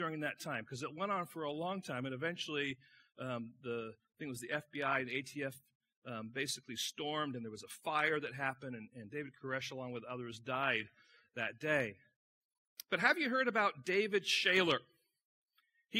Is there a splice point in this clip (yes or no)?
no